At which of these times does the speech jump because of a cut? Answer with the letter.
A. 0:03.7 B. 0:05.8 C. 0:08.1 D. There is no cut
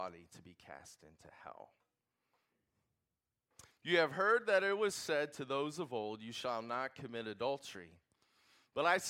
A